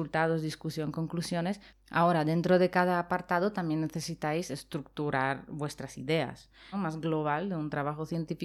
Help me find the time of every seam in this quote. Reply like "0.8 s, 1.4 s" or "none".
1.7 s, 6.7 s